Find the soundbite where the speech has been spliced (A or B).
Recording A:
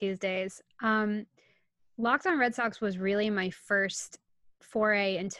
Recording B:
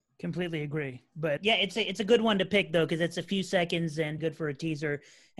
B